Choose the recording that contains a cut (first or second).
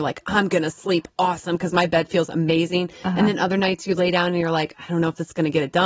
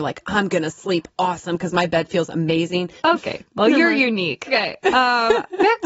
second